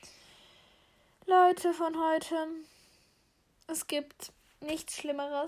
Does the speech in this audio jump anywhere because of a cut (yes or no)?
no